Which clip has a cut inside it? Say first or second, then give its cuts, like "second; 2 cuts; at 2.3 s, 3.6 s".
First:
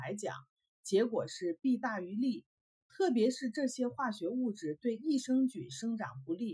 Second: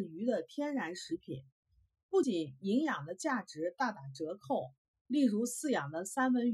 second; 1 cut; at 2.2 s